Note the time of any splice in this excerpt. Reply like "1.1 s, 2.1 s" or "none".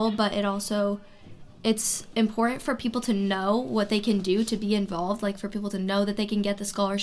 none